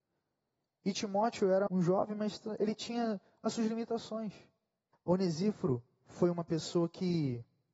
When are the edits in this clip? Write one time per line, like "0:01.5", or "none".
0:01.7
0:04.9